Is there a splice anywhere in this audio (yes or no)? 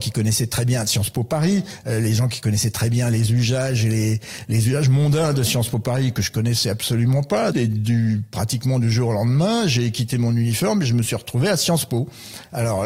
yes